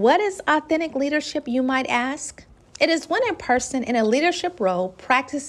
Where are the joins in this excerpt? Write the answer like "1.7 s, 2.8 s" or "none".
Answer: none